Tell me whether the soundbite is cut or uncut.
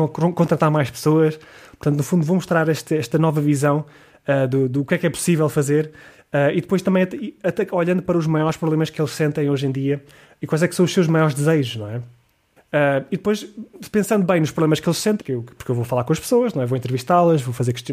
cut